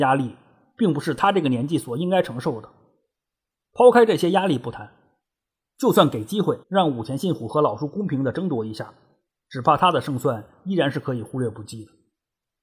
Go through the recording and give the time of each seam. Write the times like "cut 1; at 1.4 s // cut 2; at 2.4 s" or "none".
cut 1; at 6.6 s